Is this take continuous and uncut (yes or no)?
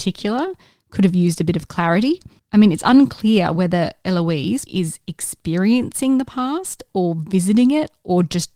no